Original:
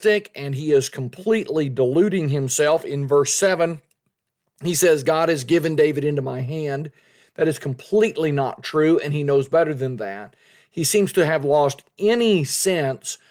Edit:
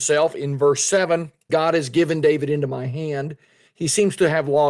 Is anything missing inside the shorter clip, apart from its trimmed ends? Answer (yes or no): yes